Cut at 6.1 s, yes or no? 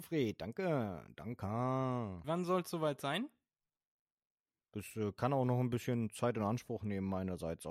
no